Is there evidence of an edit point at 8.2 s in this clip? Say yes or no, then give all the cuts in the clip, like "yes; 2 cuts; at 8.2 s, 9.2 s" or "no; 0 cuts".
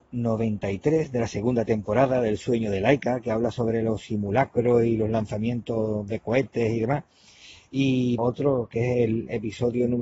yes; 1 cut; at 8.2 s